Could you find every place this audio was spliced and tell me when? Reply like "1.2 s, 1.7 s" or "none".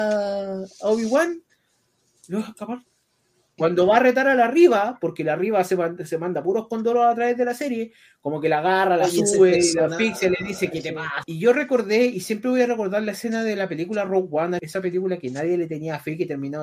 3.6 s, 11.2 s, 14.6 s